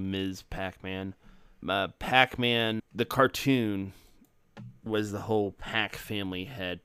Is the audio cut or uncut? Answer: cut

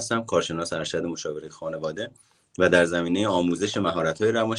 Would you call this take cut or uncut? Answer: uncut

